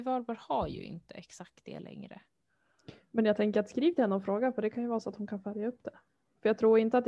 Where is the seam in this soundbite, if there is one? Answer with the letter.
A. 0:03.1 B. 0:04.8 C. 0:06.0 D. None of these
D